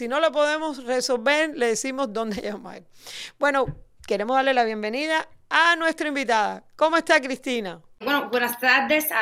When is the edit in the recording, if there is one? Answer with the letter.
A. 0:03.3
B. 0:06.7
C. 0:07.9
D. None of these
D